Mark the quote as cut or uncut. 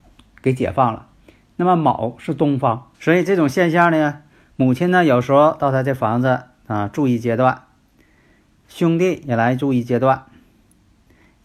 cut